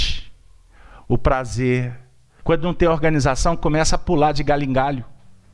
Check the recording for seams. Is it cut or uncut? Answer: cut